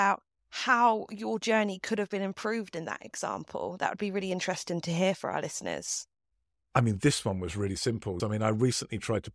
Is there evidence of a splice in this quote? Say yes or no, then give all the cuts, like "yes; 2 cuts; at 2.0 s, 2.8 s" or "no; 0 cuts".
yes; 1 cut; at 8.2 s